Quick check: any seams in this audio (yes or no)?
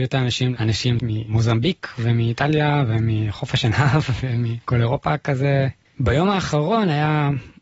yes